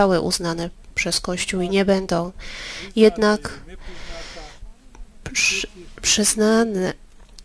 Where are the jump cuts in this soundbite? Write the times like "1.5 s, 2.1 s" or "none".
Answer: none